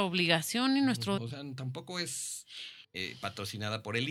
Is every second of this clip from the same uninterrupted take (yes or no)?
no